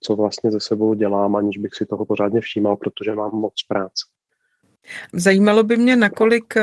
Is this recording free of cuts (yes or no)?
no